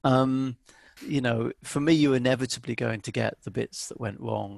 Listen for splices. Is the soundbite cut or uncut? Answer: cut